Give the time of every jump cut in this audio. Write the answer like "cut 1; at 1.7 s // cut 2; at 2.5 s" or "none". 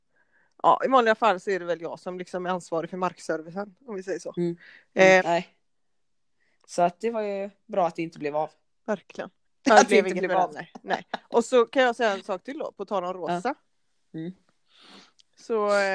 cut 1; at 5.2 s // cut 2; at 9.5 s